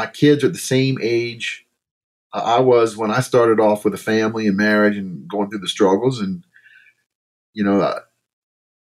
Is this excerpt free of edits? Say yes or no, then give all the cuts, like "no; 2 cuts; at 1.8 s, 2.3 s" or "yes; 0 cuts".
yes; 0 cuts